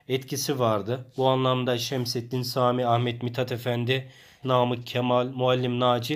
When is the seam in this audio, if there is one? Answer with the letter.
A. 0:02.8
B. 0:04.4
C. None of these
B